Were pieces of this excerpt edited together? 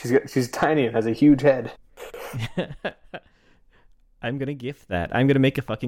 no; 0 cuts

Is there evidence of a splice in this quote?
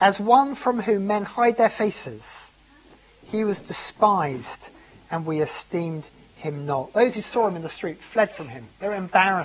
no; 0 cuts

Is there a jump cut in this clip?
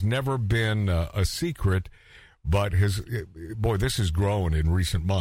no; 0 cuts

